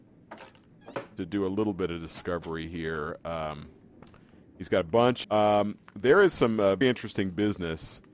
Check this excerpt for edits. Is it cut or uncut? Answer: cut